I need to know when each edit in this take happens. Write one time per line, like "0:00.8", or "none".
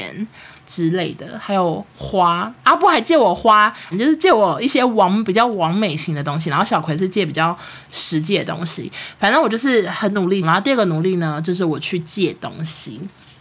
0:03.9
0:10.4